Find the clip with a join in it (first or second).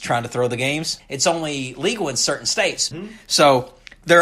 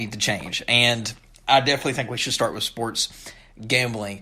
first